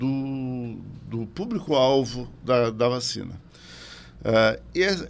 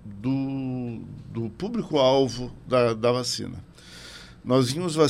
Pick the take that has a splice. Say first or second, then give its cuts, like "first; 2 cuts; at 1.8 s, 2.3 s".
first; 1 cut; at 4.2 s